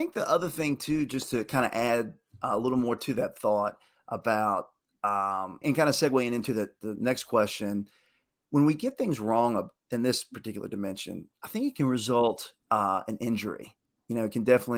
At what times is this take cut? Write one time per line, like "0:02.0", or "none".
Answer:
0:05.6